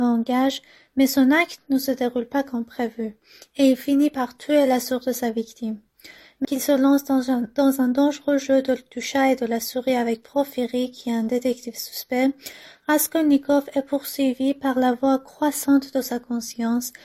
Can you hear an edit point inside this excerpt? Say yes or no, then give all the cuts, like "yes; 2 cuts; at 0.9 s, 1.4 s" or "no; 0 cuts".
yes; 1 cut; at 6.4 s